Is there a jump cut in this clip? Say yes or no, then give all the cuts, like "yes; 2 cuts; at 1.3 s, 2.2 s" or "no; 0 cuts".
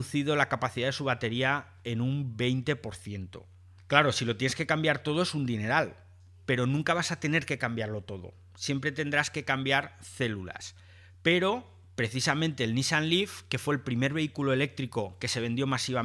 yes; 1 cut; at 3.8 s